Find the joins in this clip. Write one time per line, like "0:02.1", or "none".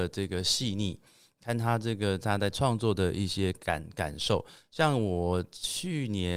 none